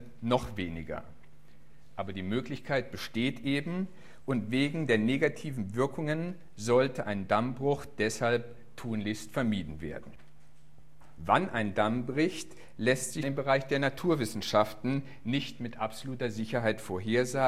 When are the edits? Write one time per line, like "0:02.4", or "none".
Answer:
0:11.2
0:13.2